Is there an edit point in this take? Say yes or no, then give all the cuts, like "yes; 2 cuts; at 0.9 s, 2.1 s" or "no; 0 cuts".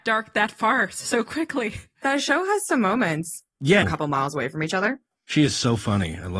yes; 1 cut; at 3.8 s